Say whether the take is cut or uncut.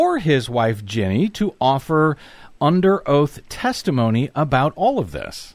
uncut